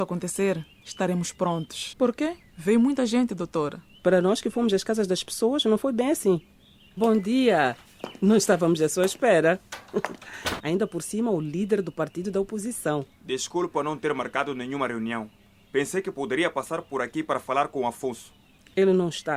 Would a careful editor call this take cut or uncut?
cut